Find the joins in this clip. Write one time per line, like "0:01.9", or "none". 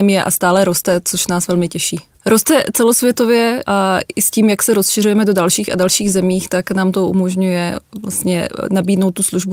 0:02.1